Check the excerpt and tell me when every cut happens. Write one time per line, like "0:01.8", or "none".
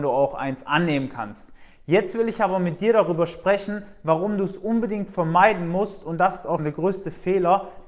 0:06.6